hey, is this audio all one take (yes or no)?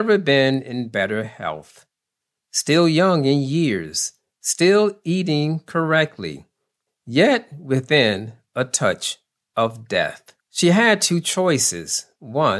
no